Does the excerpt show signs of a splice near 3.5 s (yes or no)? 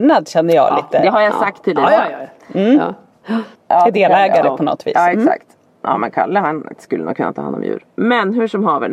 yes